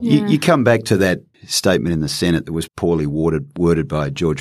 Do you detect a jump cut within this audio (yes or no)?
yes